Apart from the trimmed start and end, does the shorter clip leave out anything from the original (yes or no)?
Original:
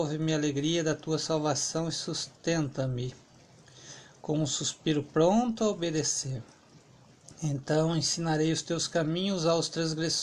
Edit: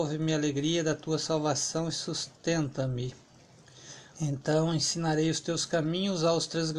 yes